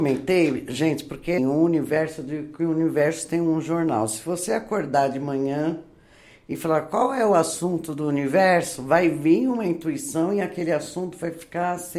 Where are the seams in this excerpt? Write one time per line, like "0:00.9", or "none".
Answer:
0:01.4